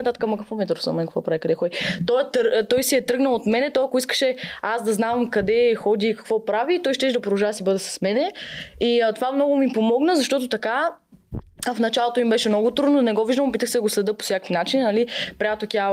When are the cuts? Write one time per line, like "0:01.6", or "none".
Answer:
none